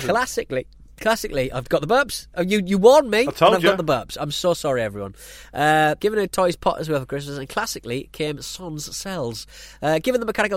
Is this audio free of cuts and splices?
no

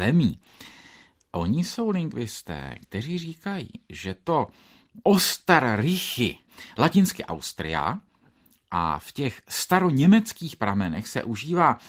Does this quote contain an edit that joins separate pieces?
no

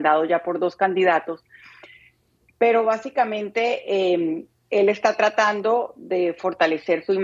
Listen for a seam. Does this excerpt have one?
no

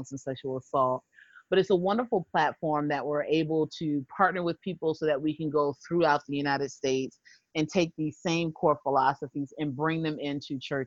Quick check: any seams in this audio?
no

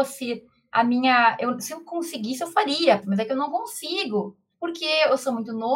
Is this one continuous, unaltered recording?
no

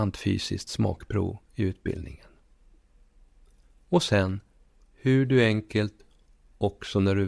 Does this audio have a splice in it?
no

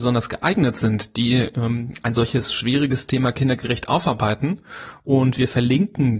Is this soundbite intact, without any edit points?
yes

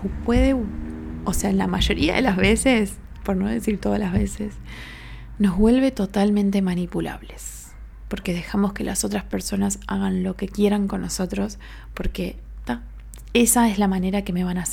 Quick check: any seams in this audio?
no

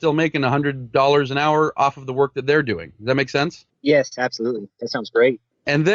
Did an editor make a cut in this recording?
no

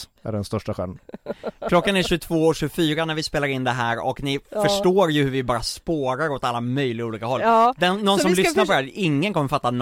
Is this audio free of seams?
yes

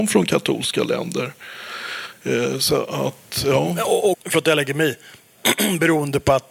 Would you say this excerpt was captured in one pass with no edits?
no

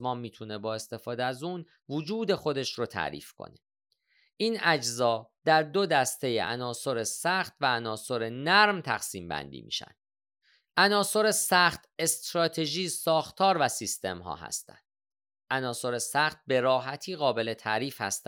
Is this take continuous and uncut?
yes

